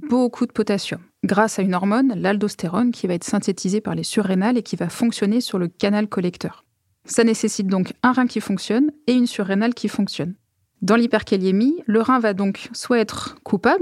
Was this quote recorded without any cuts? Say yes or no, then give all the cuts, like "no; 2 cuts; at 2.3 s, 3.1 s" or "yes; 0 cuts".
yes; 0 cuts